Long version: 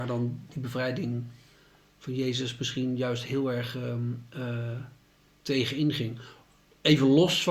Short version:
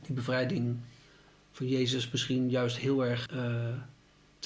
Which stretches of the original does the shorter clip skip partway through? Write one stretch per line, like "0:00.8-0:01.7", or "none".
0:03.7-0:04.3